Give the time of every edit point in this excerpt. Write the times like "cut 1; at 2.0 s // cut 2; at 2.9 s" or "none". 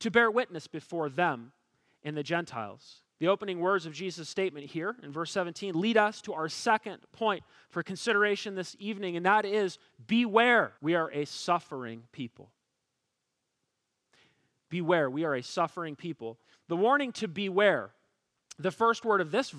cut 1; at 3.1 s // cut 2; at 10.8 s

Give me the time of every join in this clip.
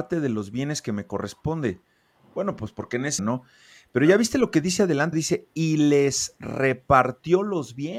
cut 1; at 3.2 s // cut 2; at 5.1 s

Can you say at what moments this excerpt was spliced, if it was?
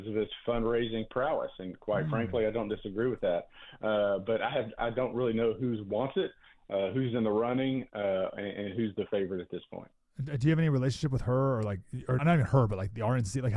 cut 1; at 12.2 s

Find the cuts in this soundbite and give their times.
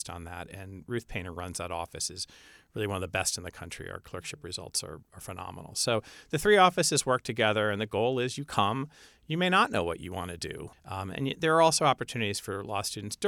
cut 1; at 5.0 s // cut 2; at 10.7 s

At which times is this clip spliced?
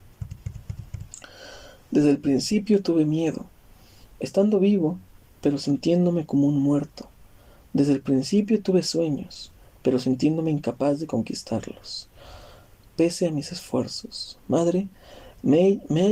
none

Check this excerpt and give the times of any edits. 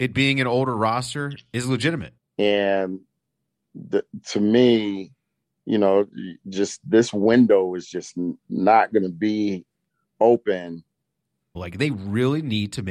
cut 1; at 2.2 s // cut 2; at 11.6 s

